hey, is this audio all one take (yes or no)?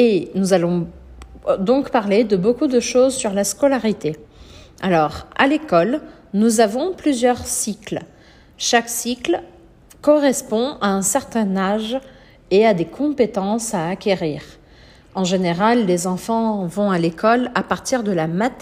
yes